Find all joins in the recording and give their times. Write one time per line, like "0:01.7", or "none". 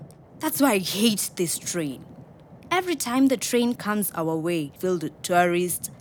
0:04.8